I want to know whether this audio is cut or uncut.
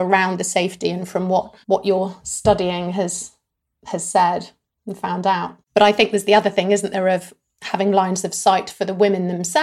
cut